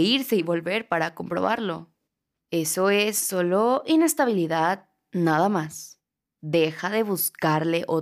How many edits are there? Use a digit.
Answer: 0